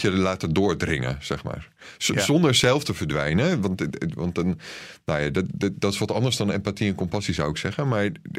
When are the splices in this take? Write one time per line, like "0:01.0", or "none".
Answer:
none